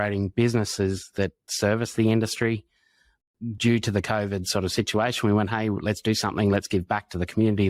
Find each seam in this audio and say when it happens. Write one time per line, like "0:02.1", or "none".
none